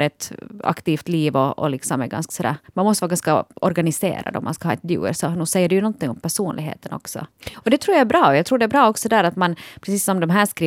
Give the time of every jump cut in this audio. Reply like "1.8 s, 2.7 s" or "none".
7.5 s